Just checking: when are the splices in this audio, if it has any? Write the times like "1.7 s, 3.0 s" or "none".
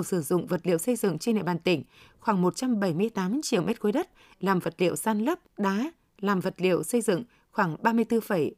5.5 s